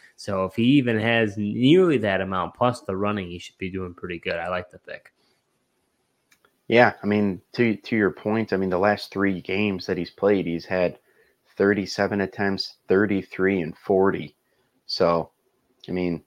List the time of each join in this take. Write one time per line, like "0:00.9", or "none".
none